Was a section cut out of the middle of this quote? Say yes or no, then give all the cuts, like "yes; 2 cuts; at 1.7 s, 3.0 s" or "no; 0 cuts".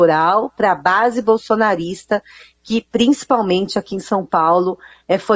no; 0 cuts